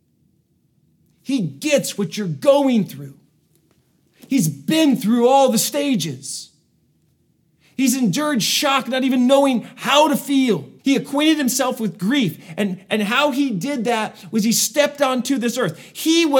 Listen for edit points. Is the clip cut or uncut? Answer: cut